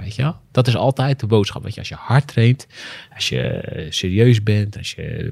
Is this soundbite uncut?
yes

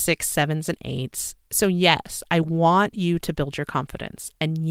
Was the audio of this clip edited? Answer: yes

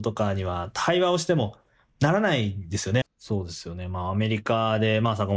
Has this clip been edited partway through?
yes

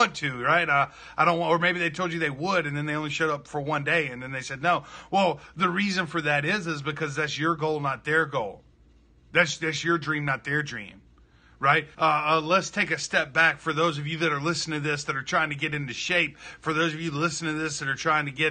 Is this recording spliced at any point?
yes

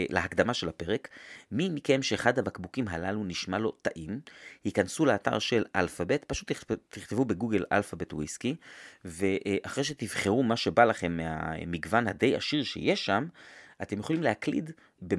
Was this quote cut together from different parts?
no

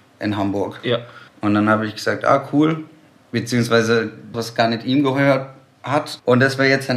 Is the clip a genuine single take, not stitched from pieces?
no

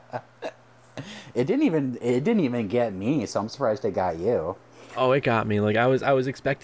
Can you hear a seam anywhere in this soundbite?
no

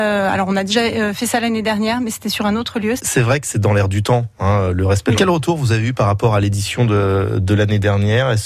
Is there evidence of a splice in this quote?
yes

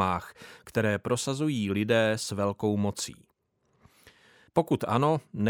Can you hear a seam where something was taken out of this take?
yes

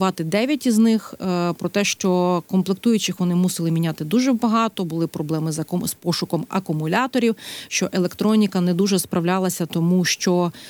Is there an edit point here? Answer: no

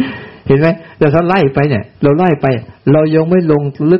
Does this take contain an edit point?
yes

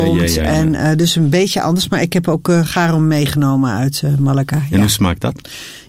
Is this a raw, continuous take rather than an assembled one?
yes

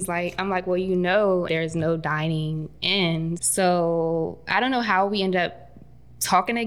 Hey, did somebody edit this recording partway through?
yes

